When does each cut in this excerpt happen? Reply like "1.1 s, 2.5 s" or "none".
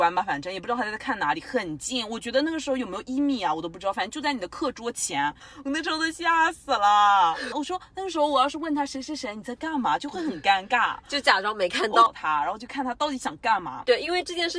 7.5 s, 12.1 s